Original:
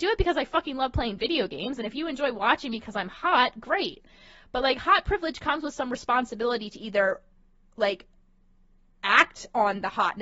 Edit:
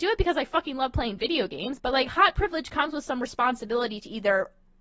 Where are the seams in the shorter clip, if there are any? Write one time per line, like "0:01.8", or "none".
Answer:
0:01.8

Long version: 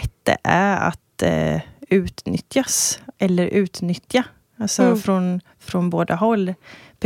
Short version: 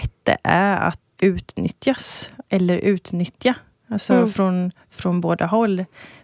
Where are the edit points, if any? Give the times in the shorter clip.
0:01.2

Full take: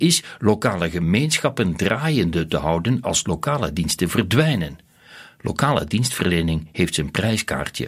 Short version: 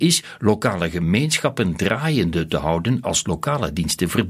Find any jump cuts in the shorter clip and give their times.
none

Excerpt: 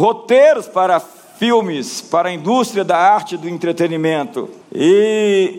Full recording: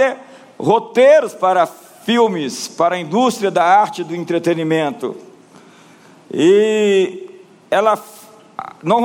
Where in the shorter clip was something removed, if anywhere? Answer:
0:04.6

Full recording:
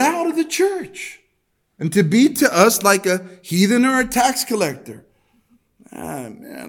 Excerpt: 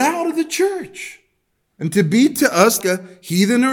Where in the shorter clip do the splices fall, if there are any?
0:02.8

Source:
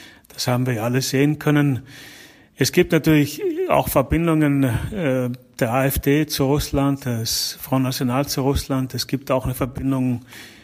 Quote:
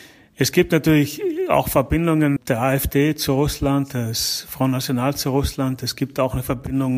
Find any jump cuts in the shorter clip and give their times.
0:02.4

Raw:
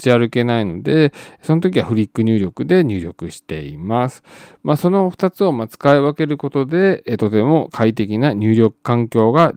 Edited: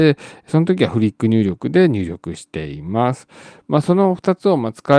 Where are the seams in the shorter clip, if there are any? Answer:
none

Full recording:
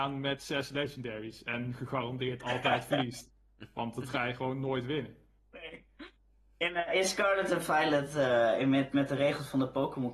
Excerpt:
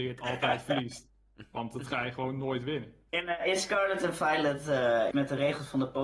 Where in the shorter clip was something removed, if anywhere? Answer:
0:03.1
0:05.1

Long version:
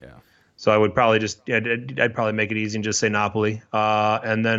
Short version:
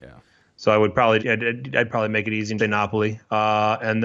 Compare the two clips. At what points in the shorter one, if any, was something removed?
0:01.2
0:02.6

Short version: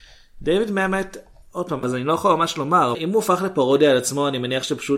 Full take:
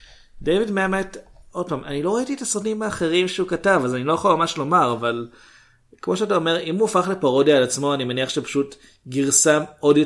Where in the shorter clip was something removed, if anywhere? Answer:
0:01.8
0:02.9

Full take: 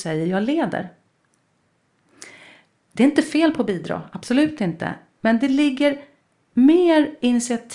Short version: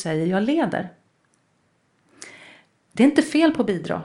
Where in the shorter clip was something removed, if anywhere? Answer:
none

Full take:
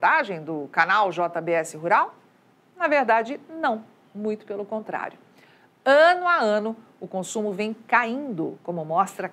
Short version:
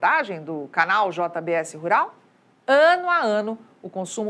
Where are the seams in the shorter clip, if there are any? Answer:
0:02.6

